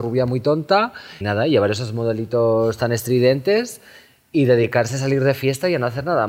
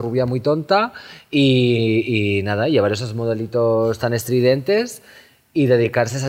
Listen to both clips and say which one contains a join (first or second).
first